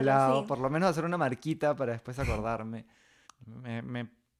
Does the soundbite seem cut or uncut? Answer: cut